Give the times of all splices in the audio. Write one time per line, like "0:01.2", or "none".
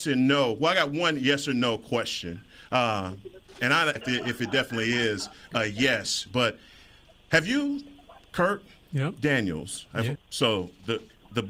0:04.0
0:10.2

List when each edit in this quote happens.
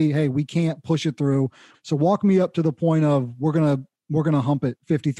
0:01.7

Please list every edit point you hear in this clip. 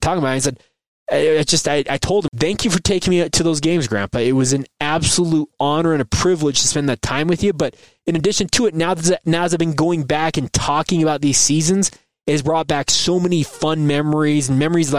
0:02.3

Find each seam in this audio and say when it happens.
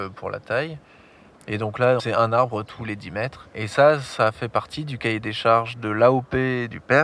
0:02.0

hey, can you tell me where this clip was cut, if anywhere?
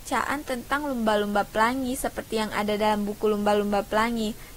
none

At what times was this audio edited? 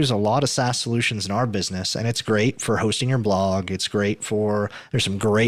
none

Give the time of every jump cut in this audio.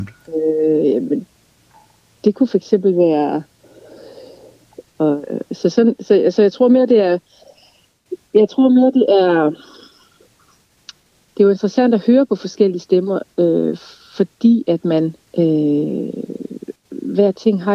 0:04.8
0:15.2
0:16.7

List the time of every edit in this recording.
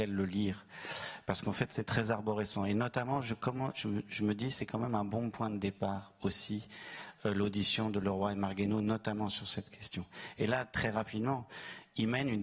none

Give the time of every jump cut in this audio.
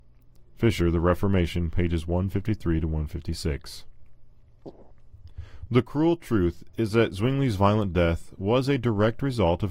0:05.7

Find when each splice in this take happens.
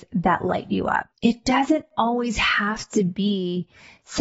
0:01.1

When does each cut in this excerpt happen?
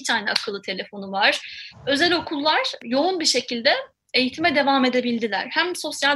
0:01.7

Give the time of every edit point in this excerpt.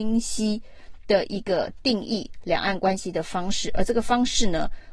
none

